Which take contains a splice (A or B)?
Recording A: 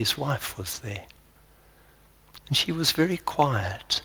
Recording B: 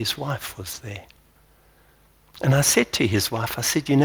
A